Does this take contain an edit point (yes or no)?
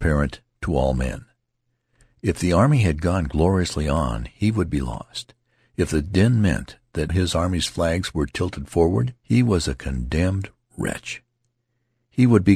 yes